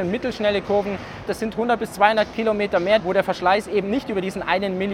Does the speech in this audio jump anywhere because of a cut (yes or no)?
yes